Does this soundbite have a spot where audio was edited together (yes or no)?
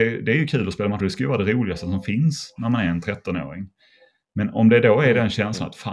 no